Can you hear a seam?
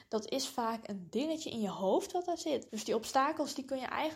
yes; 1 cut; at 2.7 s

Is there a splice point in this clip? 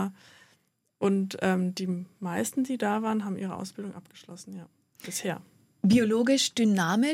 no; 0 cuts

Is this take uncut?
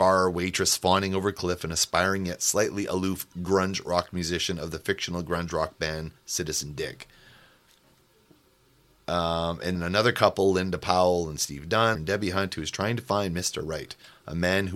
no; 2 cuts; at 9.8 s, 12.0 s

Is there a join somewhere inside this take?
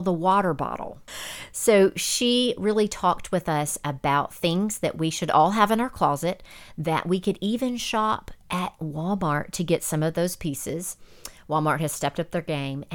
yes; 2 cuts; at 1.1 s, 8.4 s

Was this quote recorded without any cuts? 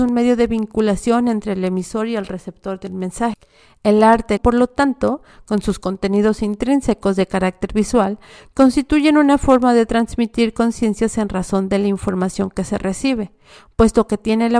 no; 1 cut; at 4.4 s

